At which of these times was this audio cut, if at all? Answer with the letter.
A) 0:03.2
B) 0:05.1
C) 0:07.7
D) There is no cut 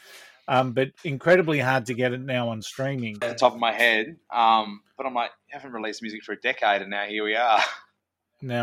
A